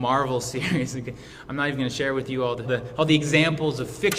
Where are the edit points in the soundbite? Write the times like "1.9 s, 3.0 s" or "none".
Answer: 2.6 s